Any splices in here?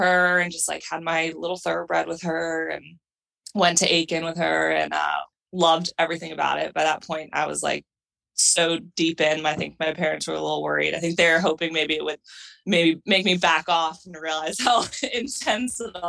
no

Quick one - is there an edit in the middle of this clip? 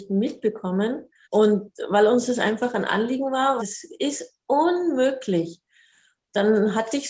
yes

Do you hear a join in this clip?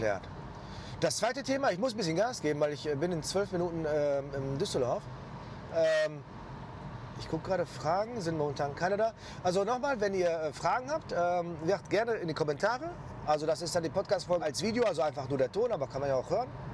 yes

